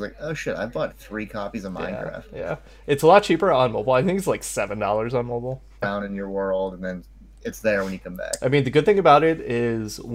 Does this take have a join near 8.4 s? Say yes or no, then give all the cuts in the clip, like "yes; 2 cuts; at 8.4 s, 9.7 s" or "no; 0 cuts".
no; 1 cut; at 5.8 s